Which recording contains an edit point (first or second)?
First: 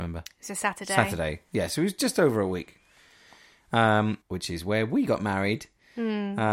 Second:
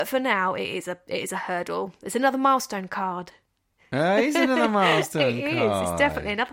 first